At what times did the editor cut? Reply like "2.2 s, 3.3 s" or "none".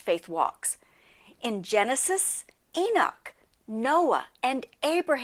none

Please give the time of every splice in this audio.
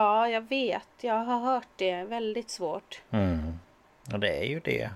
none

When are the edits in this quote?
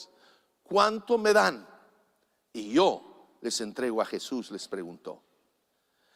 none

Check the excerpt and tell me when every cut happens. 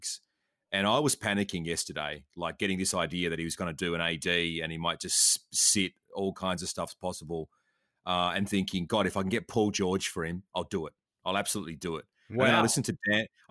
none

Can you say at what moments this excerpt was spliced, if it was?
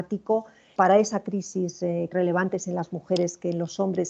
2.1 s

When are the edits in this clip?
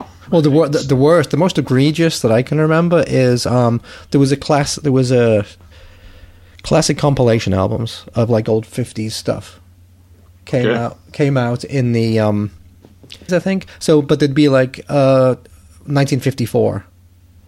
13.3 s

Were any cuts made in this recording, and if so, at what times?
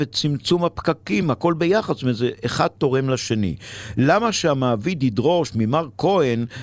none

